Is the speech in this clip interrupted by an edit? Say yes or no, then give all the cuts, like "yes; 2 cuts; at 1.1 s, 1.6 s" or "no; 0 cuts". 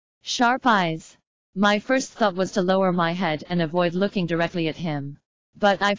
no; 0 cuts